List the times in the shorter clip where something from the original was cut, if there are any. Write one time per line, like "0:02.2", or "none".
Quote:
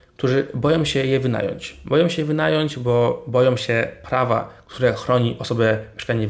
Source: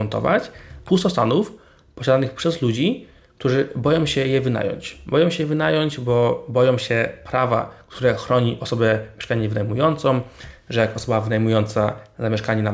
none